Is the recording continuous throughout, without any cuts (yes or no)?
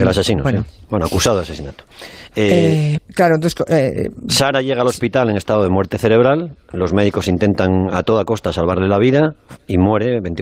no